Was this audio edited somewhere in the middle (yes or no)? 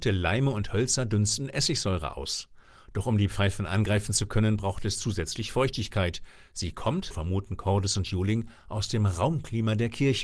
yes